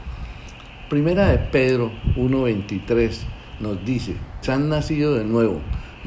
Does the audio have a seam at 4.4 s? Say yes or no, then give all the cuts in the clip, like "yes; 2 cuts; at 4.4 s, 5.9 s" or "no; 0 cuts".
yes; 1 cut; at 4.4 s